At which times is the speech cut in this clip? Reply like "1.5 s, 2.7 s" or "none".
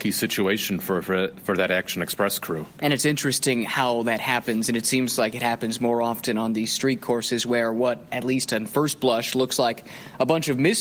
none